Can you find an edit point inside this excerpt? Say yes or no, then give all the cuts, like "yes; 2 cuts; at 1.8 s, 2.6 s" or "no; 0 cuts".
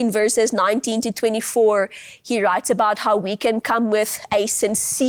no; 0 cuts